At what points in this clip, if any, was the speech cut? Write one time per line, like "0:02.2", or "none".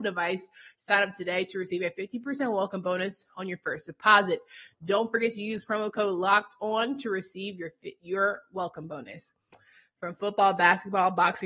none